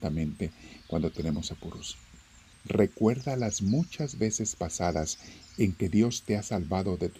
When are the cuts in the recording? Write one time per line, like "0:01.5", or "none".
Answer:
0:02.5